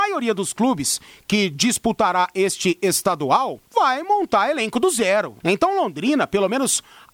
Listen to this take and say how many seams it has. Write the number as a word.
two